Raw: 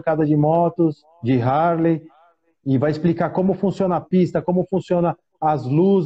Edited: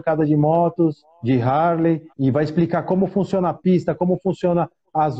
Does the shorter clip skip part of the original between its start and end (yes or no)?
yes